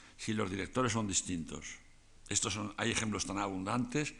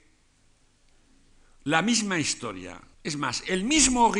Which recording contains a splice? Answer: second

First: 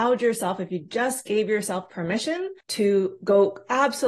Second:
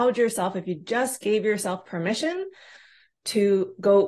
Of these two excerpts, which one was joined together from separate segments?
first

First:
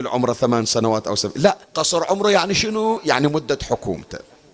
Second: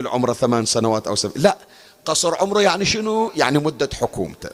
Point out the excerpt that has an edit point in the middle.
first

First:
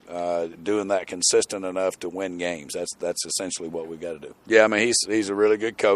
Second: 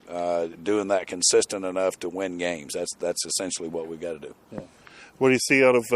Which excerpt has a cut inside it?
first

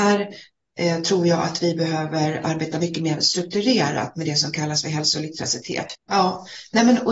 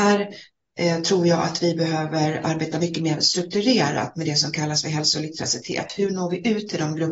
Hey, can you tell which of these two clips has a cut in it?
first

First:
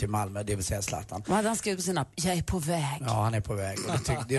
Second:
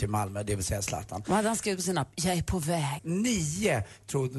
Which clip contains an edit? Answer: second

